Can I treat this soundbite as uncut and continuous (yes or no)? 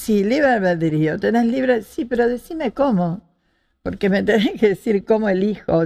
yes